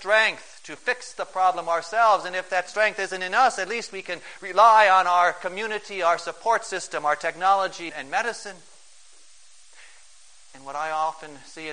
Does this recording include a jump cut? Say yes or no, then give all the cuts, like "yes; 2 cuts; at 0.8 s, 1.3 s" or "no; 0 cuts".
yes; 1 cut; at 7.9 s